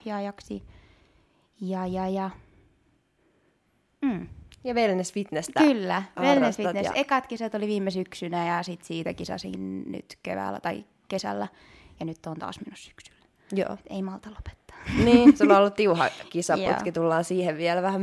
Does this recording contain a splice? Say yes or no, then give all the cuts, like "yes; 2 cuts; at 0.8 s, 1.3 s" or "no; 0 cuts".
no; 0 cuts